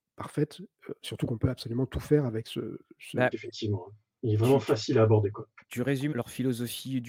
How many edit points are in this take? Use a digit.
2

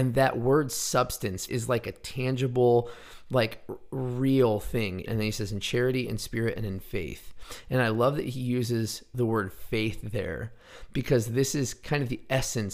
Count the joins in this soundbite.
2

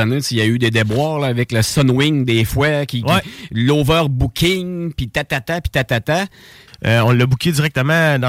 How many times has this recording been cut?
1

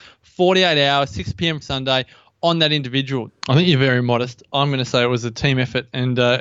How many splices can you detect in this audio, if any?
2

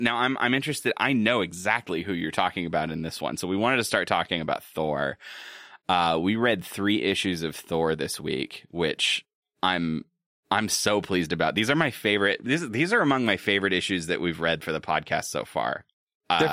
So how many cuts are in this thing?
0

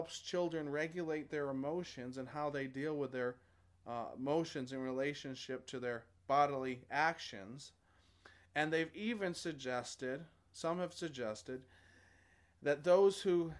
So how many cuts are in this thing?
0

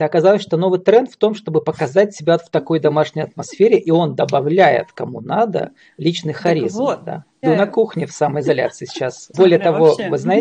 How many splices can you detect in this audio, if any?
2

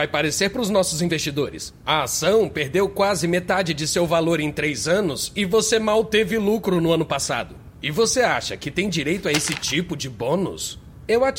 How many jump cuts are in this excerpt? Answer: 0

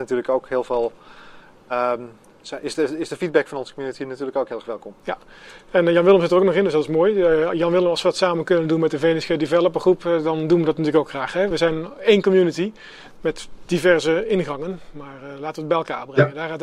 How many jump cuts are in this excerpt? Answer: 0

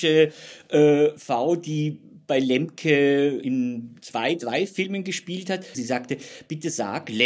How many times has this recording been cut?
1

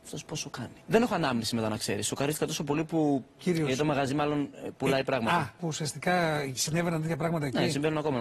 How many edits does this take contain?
0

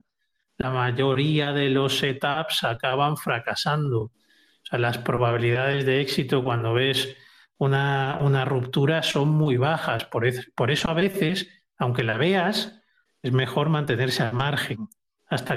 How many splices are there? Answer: 0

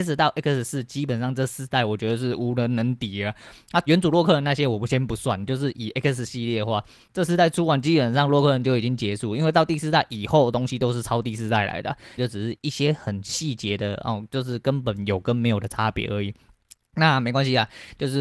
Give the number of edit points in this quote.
2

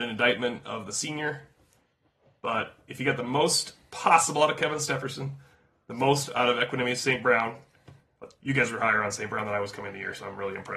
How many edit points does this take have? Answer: 0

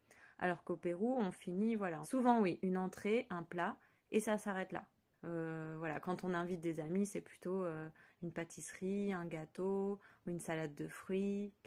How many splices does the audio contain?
2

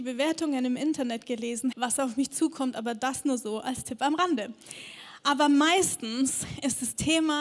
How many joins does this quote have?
1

